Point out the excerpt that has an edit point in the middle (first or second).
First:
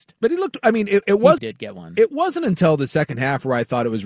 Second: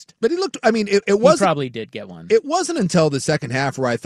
first